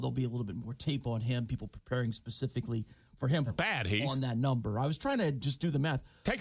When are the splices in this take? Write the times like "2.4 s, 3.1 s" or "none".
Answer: 3.5 s